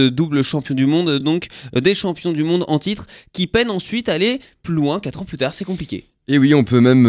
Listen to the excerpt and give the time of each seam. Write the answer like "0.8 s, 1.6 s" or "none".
none